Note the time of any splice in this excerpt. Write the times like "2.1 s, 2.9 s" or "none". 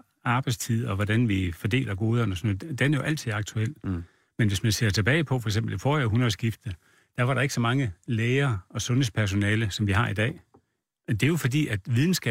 none